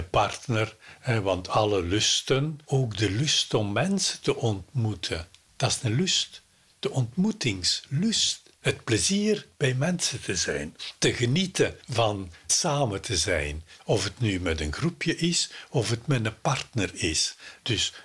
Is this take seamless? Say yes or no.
yes